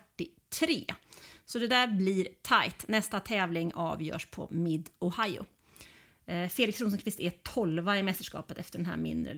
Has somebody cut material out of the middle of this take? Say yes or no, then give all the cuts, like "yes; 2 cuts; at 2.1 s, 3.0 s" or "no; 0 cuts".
no; 0 cuts